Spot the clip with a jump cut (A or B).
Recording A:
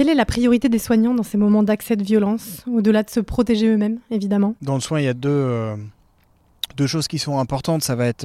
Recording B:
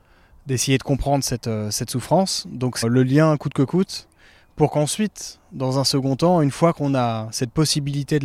B